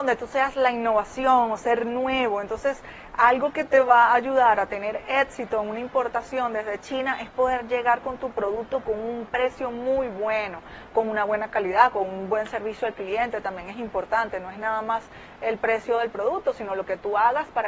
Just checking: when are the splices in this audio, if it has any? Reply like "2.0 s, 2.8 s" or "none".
none